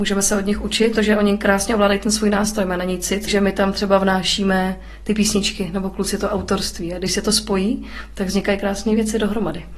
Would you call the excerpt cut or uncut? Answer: cut